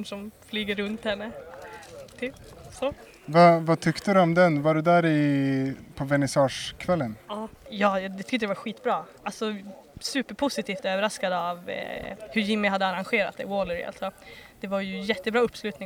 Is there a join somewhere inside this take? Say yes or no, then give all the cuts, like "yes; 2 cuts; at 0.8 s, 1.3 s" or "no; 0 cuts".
yes; 1 cut; at 7.7 s